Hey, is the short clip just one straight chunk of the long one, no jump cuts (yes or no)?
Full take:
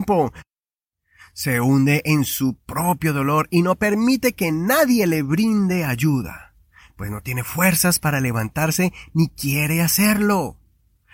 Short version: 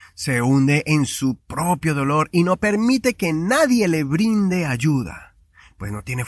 yes